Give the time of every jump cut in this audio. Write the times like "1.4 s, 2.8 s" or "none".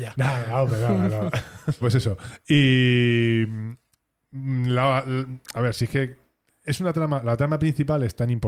1.8 s